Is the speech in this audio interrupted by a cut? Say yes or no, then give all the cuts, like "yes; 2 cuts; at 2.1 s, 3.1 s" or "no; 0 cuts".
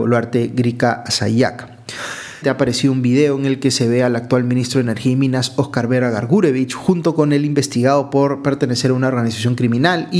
yes; 1 cut; at 2.4 s